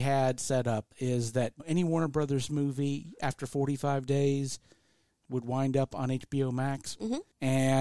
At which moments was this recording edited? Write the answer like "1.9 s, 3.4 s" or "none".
none